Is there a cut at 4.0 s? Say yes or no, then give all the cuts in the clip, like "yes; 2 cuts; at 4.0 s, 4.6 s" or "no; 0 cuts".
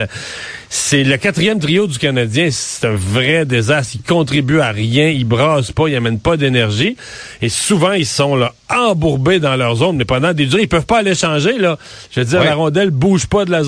no; 0 cuts